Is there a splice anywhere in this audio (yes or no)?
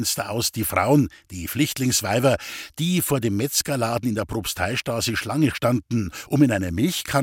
no